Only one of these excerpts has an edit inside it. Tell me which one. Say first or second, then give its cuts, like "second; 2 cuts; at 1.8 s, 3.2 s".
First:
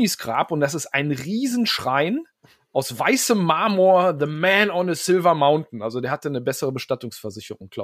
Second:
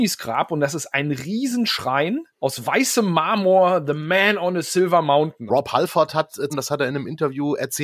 second; 3 cuts; at 2.3 s, 5.5 s, 6.5 s